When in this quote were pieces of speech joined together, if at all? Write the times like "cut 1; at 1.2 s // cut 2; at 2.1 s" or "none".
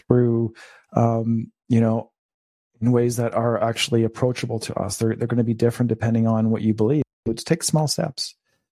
none